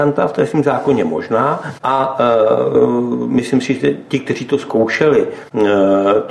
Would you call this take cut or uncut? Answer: uncut